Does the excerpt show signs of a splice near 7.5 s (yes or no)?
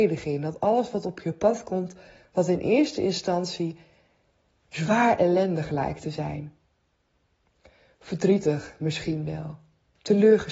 no